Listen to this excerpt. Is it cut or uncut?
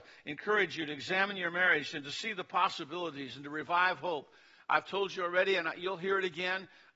uncut